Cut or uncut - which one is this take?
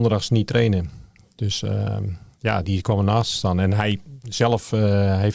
cut